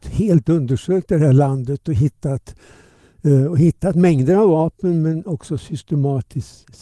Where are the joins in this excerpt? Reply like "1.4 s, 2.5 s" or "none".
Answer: none